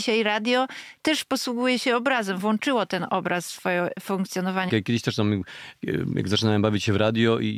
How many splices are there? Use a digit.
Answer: 1